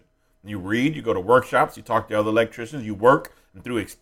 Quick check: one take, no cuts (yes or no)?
yes